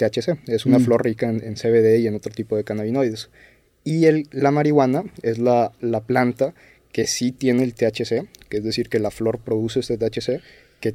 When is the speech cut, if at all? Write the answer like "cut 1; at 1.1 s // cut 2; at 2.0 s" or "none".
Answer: none